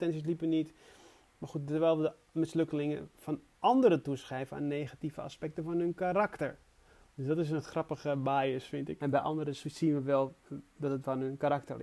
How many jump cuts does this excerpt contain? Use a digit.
1